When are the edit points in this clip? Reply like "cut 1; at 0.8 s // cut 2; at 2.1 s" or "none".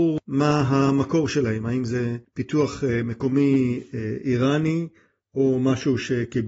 none